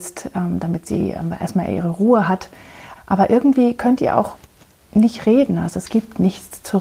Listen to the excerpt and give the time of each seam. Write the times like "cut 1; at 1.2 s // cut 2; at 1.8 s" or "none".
cut 1; at 3.0 s

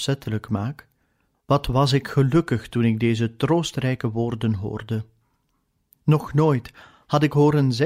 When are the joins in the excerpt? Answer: cut 1; at 1.3 s

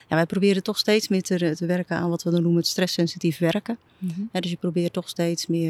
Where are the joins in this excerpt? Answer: none

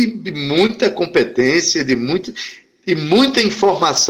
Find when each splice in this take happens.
none

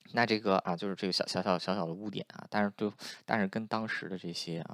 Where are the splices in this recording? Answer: none

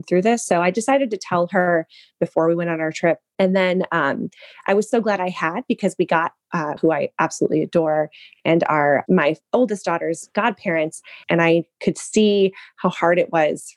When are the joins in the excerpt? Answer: cut 1; at 6.8 s // cut 2; at 11.2 s

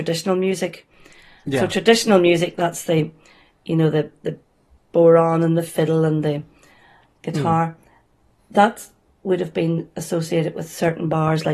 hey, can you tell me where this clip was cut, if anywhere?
none

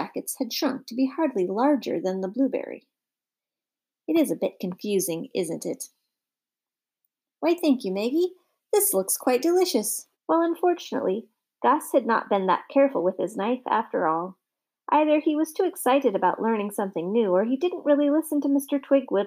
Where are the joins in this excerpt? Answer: cut 1; at 10.1 s

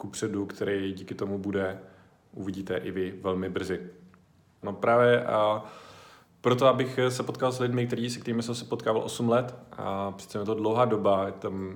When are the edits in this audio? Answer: cut 1; at 4.6 s

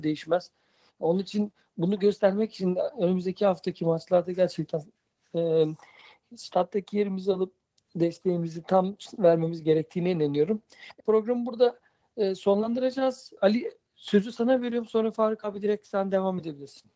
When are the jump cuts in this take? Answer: none

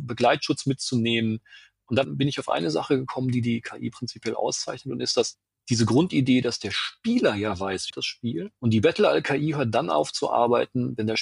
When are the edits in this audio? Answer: cut 1; at 7.9 s

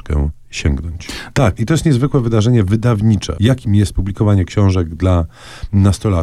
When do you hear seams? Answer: cut 1; at 1.3 s // cut 2; at 3.4 s

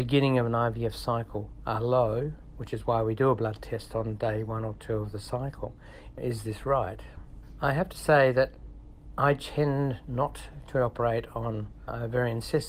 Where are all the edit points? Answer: cut 1; at 6.1 s

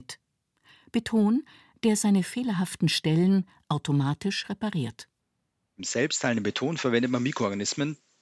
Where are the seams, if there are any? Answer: none

